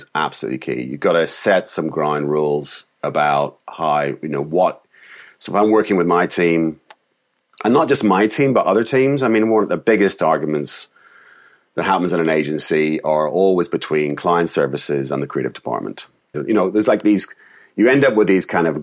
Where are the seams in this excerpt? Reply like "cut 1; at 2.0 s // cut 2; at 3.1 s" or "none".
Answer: cut 1; at 16.3 s